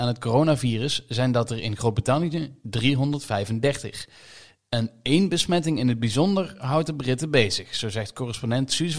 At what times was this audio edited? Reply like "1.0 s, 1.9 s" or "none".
none